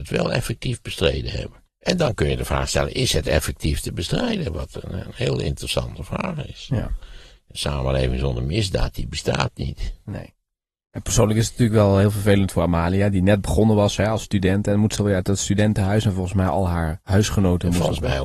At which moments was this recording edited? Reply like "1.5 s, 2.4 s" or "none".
1.6 s